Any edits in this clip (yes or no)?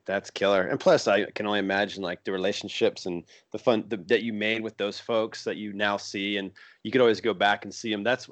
no